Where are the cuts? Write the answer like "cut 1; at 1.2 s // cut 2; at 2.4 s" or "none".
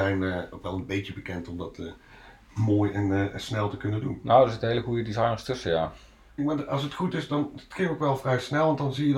cut 1; at 6.4 s